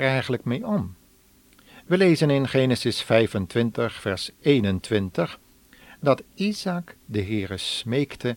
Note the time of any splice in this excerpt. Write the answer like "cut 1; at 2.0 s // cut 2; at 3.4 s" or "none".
none